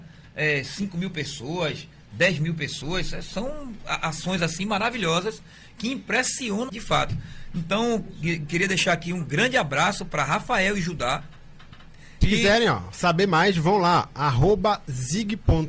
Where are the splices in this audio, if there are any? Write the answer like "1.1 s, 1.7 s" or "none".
6.7 s, 12.2 s